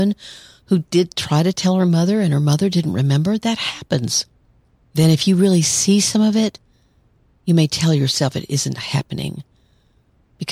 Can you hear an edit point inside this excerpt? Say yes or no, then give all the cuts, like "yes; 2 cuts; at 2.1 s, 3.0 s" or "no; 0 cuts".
no; 0 cuts